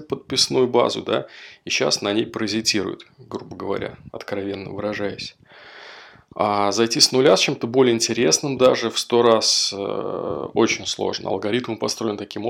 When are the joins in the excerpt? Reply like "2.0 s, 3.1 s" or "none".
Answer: none